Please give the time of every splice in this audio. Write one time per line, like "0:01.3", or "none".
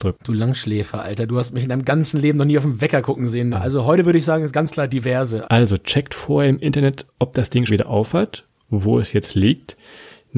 0:03.5
0:05.4
0:07.7